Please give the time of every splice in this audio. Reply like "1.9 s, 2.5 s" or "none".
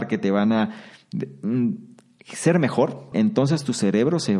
3.1 s

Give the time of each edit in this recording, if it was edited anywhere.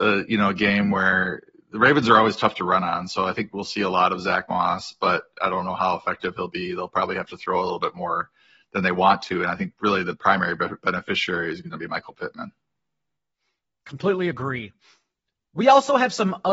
none

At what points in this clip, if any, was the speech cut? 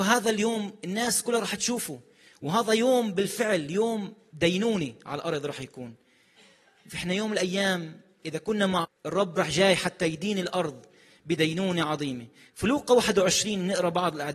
8.8 s

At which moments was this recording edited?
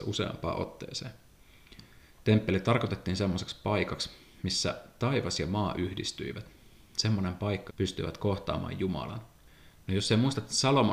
7.7 s, 9.8 s

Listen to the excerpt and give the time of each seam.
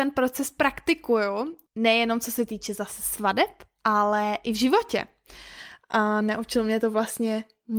none

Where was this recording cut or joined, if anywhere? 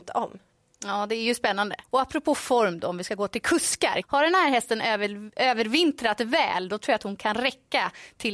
1.8 s, 4.0 s

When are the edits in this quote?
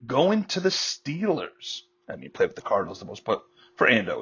none

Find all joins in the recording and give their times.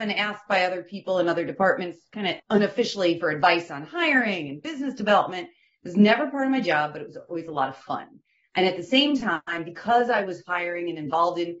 2.4 s

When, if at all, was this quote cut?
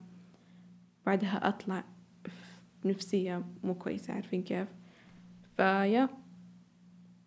none

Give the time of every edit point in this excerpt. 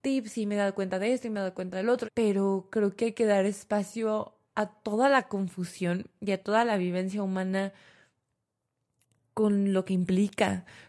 2.0 s, 4.4 s

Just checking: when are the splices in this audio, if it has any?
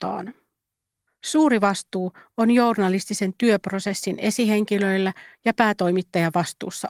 1.1 s

